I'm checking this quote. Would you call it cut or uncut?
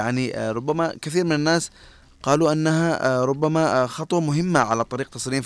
uncut